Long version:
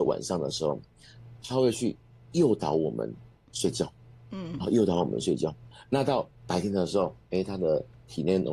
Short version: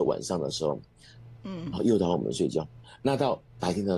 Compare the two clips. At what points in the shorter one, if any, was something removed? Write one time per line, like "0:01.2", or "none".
0:01.4